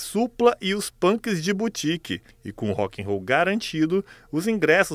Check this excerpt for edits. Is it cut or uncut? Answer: cut